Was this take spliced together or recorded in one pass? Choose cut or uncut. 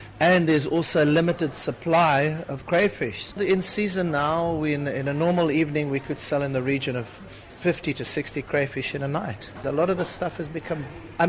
cut